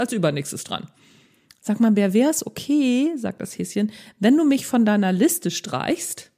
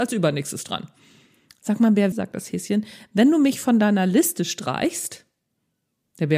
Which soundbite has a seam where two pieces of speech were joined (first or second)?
second